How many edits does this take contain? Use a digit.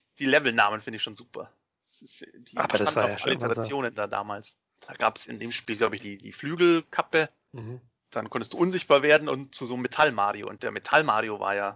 2